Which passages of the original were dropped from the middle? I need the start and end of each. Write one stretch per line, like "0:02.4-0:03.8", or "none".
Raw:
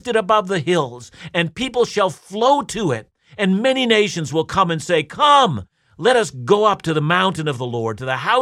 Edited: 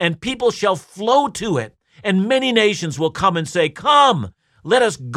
none